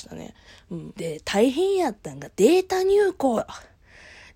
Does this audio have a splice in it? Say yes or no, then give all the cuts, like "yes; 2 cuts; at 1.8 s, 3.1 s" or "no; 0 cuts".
yes; 1 cut; at 0.9 s